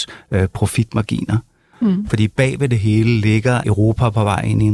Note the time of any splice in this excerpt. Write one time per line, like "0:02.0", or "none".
0:01.7
0:03.6